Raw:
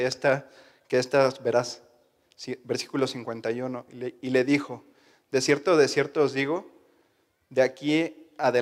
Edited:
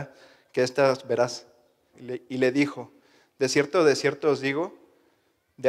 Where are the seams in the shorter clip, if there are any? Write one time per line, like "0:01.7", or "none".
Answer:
0:01.9